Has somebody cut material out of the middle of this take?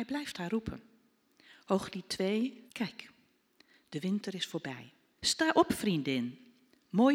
yes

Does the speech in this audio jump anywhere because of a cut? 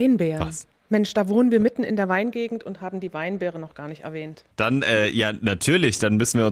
no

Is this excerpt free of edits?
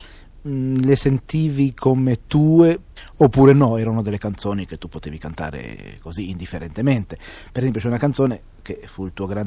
yes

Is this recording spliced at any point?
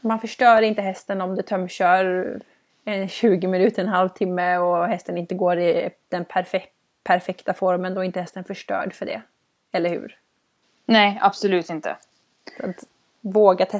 no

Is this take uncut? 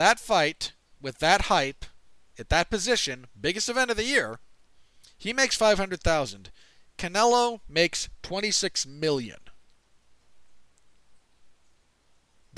yes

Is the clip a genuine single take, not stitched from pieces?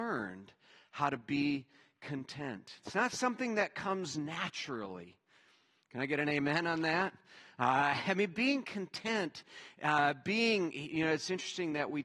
yes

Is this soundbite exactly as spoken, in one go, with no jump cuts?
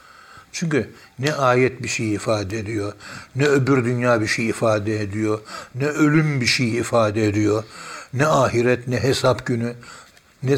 no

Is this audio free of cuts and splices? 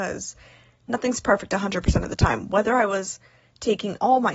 yes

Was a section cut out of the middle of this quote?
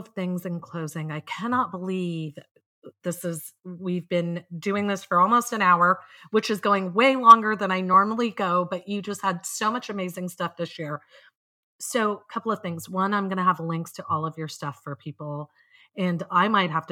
no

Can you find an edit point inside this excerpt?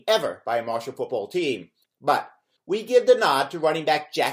yes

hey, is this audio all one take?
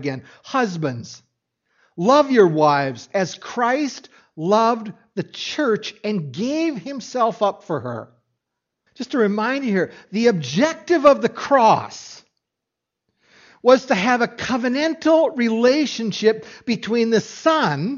no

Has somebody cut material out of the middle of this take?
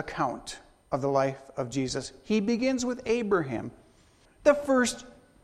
yes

